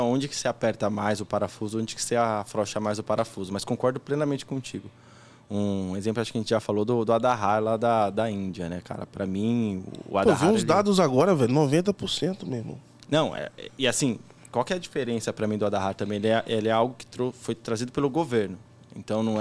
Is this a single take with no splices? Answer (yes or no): yes